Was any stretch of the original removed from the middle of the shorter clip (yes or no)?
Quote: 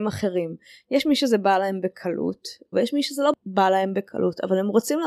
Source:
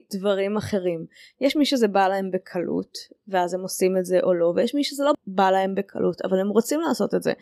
yes